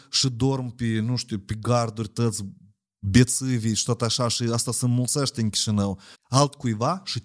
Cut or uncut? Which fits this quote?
cut